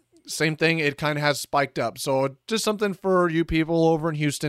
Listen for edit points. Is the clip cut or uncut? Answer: uncut